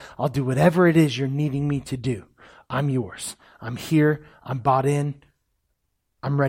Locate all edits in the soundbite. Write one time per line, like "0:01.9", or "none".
none